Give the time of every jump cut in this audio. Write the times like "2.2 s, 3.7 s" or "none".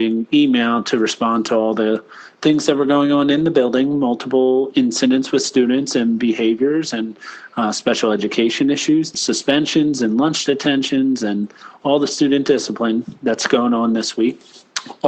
9.1 s, 13.2 s